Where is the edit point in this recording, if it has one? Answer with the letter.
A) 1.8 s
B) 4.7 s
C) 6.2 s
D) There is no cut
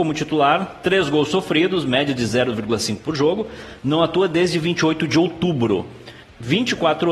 C